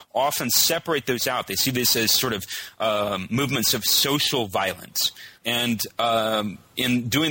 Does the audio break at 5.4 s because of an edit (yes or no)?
yes